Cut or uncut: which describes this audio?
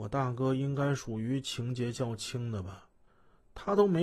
uncut